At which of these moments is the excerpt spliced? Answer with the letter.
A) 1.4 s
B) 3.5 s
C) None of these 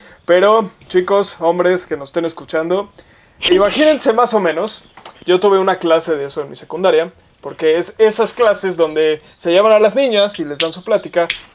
B